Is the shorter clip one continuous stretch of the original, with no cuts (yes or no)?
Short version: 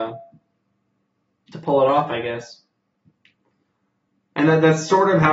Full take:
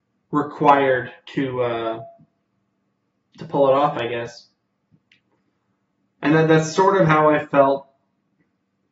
yes